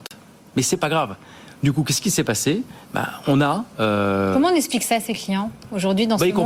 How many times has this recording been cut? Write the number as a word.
zero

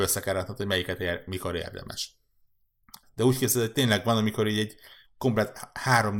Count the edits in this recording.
one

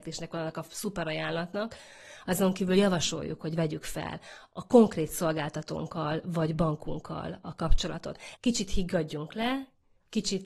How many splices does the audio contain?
one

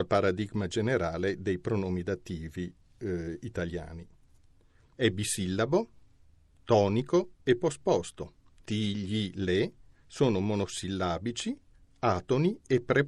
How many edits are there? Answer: two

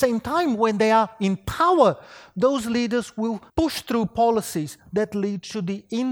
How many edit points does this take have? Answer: one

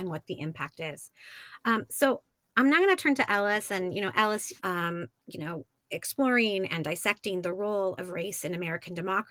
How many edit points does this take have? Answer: one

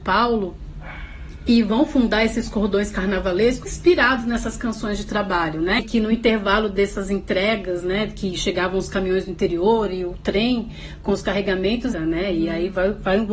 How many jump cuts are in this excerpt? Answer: three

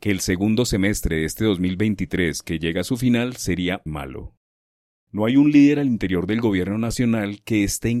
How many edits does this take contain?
one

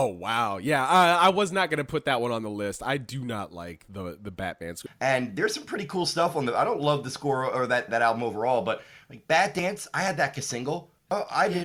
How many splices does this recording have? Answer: two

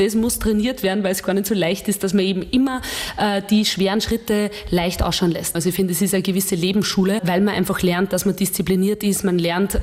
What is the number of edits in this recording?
two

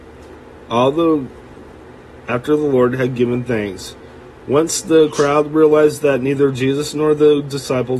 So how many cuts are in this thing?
zero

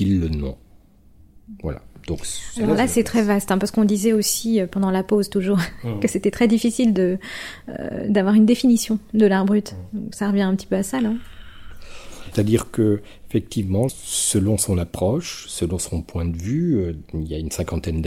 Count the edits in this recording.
two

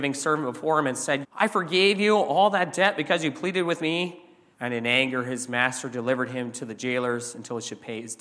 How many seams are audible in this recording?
two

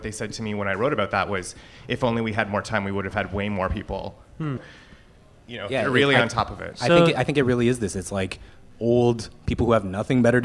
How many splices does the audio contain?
one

